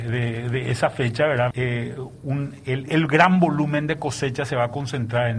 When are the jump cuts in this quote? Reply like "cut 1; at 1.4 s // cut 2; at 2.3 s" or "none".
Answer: cut 1; at 1.5 s // cut 2; at 2.9 s

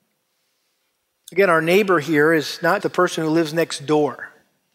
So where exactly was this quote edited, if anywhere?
cut 1; at 2.8 s

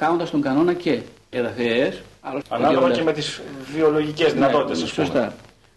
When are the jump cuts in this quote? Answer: cut 1; at 1.3 s // cut 2; at 2.4 s

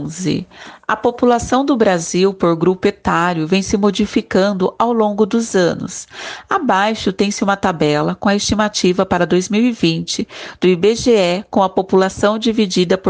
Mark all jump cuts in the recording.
none

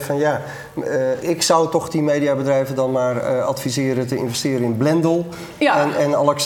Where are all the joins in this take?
cut 1; at 1.2 s

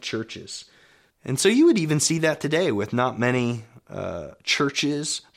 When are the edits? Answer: cut 1; at 1.1 s

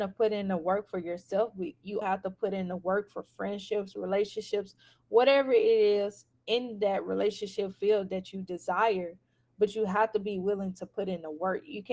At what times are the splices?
cut 1; at 2.0 s

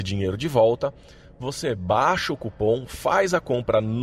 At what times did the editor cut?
none

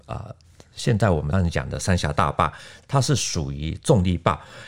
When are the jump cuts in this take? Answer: cut 1; at 1.3 s // cut 2; at 2.8 s

